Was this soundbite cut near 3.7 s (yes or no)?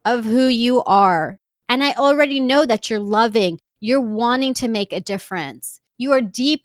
yes